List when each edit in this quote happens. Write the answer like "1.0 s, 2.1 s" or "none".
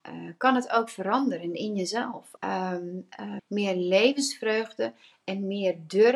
2.4 s, 3.4 s